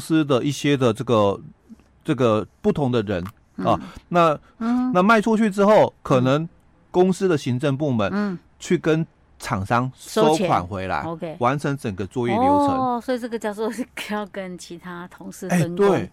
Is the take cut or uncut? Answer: cut